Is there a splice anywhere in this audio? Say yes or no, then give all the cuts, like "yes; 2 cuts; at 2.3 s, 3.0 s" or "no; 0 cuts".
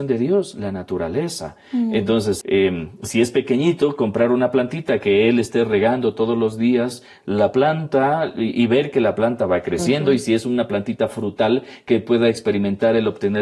yes; 1 cut; at 2.4 s